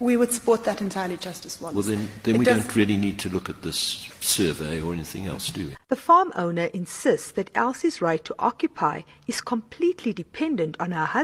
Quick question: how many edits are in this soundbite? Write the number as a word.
one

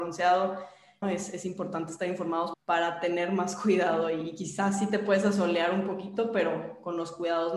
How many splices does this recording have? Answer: two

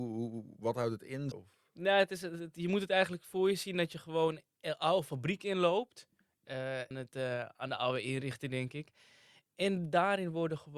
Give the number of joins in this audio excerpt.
two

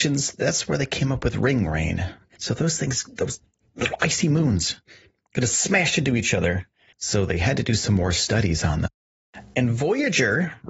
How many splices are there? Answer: three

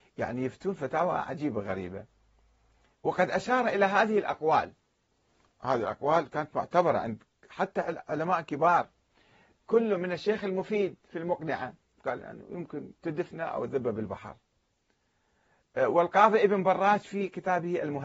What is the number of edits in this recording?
two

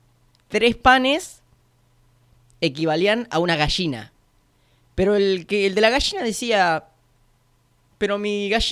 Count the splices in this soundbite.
zero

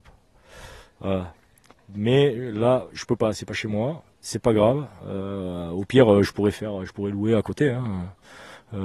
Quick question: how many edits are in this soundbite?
zero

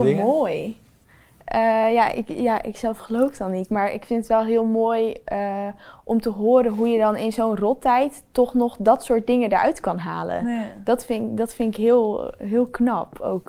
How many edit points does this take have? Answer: zero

